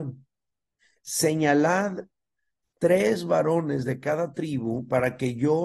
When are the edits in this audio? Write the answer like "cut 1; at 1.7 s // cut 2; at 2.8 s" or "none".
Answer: cut 1; at 1.0 s